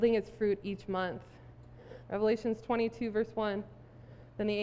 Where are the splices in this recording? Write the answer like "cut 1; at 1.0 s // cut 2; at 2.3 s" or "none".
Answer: cut 1; at 2.1 s